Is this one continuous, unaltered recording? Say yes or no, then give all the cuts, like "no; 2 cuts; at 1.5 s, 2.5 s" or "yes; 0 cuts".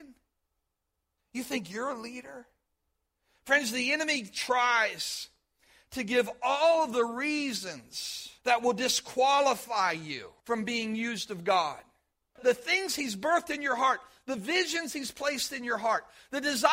no; 1 cut; at 8.4 s